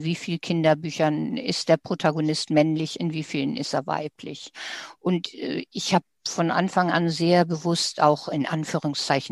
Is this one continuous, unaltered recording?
yes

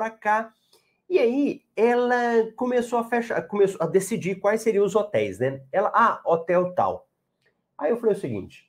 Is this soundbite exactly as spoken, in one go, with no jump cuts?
yes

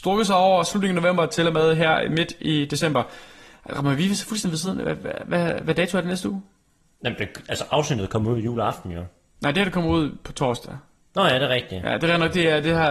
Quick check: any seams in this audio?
no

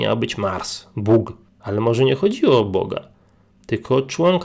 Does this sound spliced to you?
no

